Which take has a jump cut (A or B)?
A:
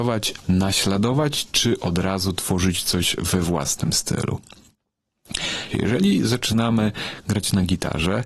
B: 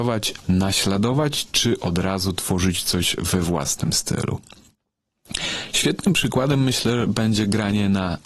A